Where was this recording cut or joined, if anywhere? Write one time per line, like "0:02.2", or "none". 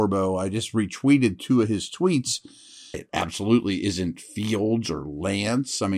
0:02.9